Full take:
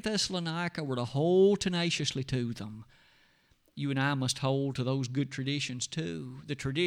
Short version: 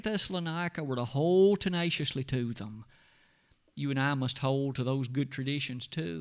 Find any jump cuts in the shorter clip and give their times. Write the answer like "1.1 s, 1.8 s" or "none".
none